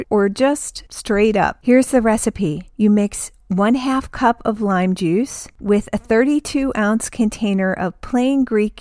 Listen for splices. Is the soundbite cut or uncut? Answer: cut